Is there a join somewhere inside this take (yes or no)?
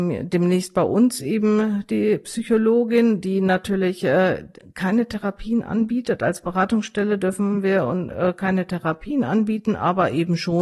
no